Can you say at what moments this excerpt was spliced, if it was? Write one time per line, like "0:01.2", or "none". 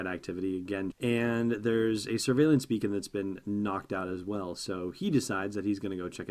0:00.9